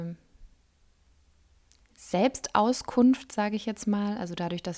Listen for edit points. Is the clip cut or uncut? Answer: uncut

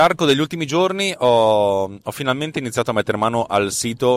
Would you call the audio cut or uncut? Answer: uncut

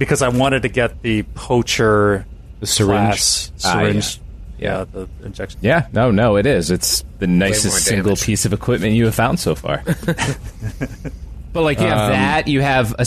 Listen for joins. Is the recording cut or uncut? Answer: cut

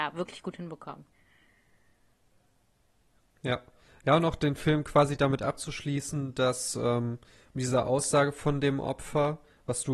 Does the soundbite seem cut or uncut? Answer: uncut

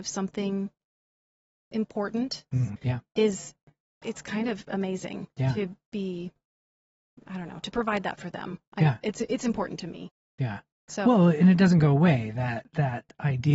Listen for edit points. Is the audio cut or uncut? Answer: cut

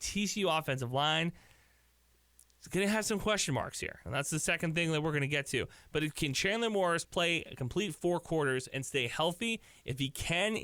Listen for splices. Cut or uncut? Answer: uncut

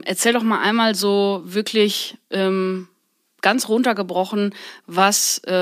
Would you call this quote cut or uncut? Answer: uncut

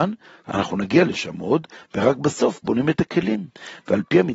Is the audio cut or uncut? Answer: cut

